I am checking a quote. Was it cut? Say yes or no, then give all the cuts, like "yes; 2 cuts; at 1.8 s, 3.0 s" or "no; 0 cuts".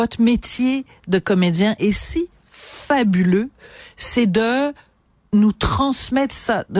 no; 0 cuts